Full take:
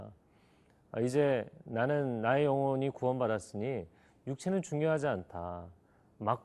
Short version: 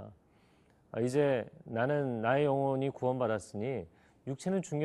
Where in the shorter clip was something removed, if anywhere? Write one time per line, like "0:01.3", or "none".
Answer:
none